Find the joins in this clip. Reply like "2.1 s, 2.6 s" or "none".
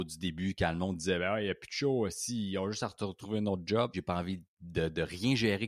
3.9 s